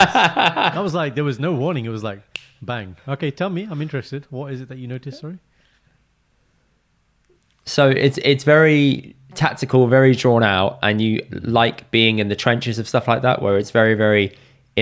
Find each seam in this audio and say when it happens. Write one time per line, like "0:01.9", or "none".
none